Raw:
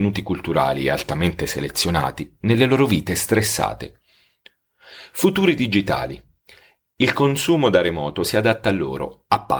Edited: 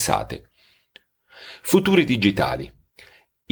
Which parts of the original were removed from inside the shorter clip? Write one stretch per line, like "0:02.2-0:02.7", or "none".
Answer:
none

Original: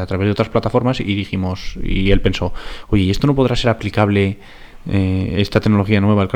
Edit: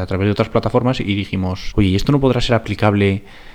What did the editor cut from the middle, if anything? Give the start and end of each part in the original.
0:01.7-0:02.9

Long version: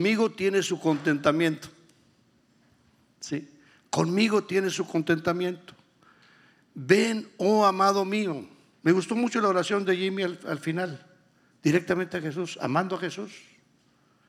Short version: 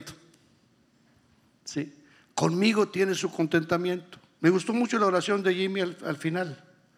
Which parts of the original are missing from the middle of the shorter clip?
0:05.9-0:08.8

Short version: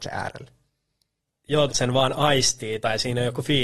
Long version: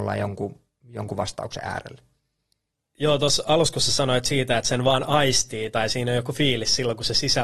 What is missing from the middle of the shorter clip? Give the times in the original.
0:03.2-0:04.6

